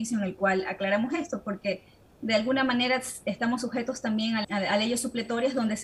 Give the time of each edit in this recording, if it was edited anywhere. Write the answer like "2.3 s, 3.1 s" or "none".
4.4 s